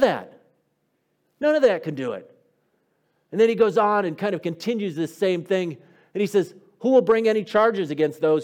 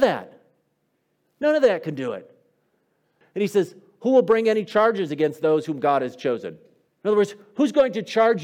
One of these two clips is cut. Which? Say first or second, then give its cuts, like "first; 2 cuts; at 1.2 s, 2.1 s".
second; 2 cuts; at 3.2 s, 6.9 s